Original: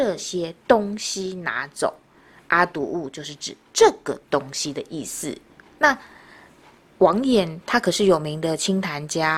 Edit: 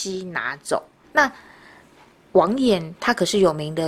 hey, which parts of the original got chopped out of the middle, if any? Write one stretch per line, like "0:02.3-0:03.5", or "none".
0:02.2-0:05.7